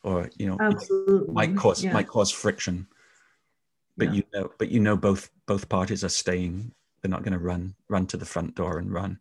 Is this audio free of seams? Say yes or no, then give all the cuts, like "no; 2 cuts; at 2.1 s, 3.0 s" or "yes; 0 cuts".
yes; 0 cuts